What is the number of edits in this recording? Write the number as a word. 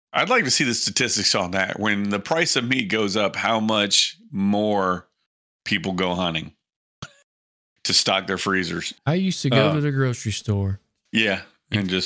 two